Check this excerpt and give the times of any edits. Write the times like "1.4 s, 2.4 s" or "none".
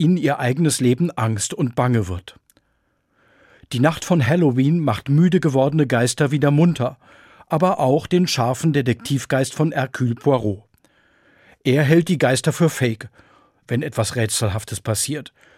13.6 s